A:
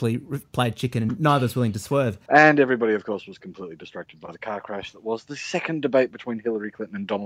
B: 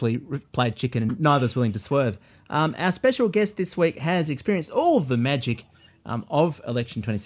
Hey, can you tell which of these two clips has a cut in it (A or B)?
A